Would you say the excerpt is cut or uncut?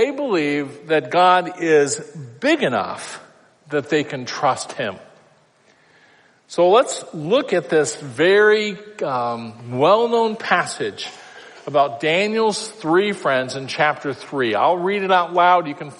uncut